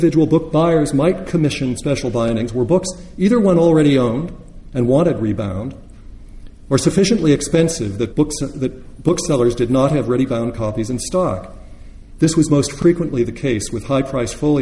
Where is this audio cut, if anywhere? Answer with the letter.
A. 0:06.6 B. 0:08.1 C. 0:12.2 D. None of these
B